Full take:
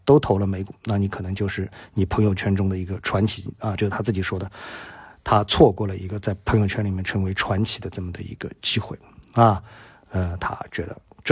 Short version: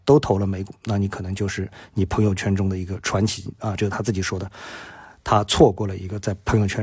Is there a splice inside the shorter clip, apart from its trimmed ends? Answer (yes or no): no